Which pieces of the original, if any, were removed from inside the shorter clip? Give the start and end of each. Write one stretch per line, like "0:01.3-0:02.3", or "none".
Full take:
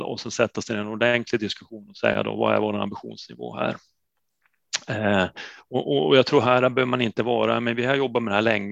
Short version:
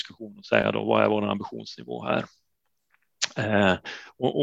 none